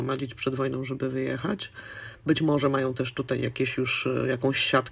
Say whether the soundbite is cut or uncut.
uncut